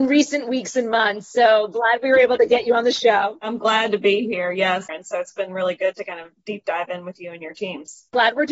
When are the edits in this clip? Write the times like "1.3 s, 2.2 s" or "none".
4.9 s